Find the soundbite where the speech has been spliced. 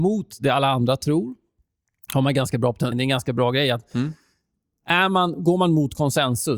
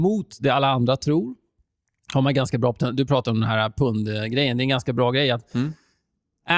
first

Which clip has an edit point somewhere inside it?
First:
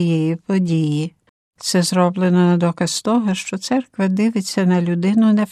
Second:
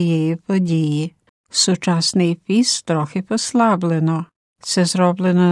first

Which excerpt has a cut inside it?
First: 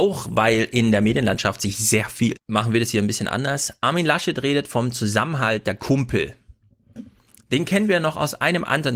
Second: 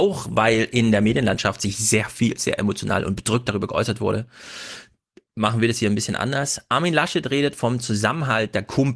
first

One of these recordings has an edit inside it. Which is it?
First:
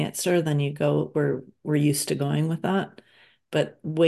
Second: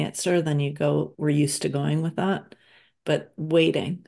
second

